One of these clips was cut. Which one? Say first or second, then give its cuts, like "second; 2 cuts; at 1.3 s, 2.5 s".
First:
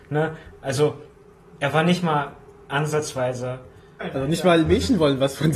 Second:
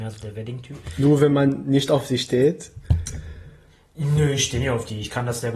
first; 1 cut; at 4.0 s